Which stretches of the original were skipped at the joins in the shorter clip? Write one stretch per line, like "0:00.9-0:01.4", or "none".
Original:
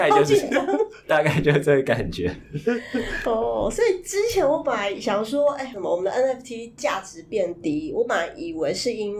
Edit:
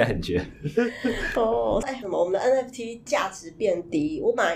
0:03.7-0:05.5